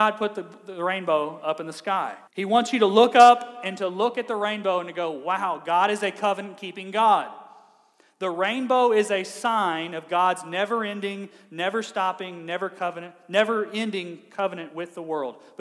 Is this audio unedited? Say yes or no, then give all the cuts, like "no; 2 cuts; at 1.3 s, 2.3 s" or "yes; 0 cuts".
no; 1 cut; at 2.3 s